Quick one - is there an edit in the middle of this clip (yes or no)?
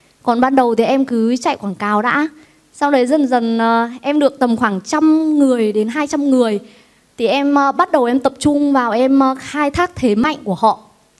no